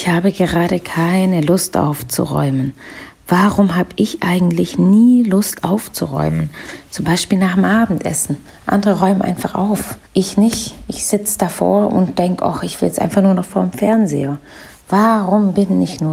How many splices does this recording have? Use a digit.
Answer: 1